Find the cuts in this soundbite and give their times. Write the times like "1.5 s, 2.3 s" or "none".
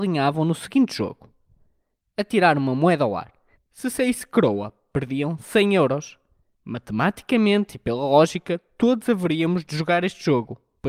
3.6 s